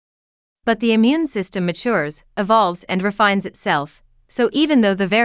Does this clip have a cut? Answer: no; 0 cuts

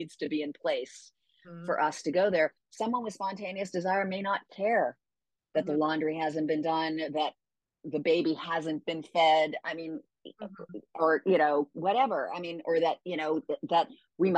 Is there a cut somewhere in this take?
no; 0 cuts

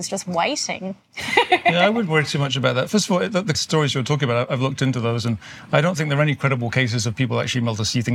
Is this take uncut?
no; 1 cut; at 3.5 s

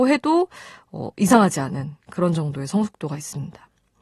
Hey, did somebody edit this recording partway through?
no; 0 cuts

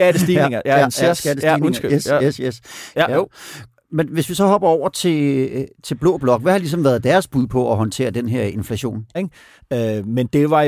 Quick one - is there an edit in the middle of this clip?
yes; 2 cuts; at 2.9 s, 9.1 s

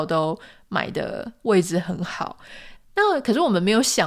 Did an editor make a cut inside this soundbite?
yes; 1 cut; at 2.8 s

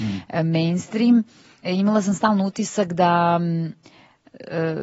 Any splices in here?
no; 0 cuts

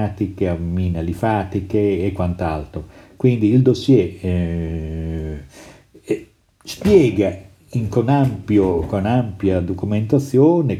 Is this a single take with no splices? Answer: yes; 0 cuts

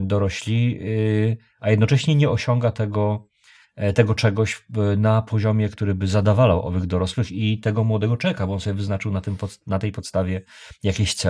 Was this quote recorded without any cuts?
yes; 0 cuts

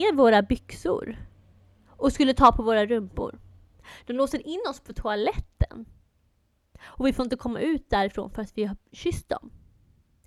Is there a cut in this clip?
no; 0 cuts

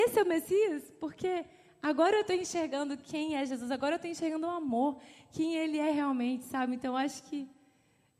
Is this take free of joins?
yes; 0 cuts

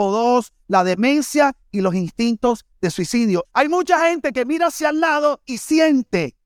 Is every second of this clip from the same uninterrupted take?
no; 1 cut; at 3.4 s

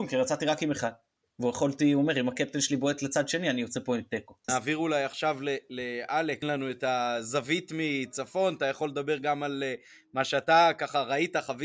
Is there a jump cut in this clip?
yes; 2 cuts; at 4.5 s, 6.4 s

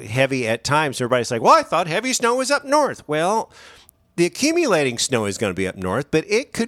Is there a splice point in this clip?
no; 0 cuts

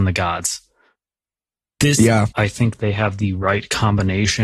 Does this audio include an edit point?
yes; 1 cut; at 2.3 s

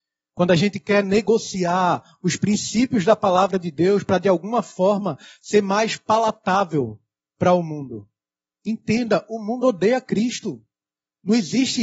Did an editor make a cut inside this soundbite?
no; 0 cuts

